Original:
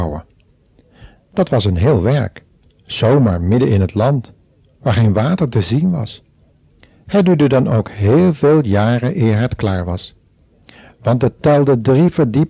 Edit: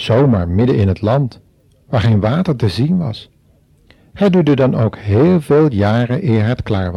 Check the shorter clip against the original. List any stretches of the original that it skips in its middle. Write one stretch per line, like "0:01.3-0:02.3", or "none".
none